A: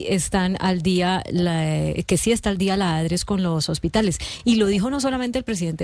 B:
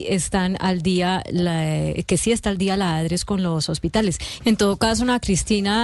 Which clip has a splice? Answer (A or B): B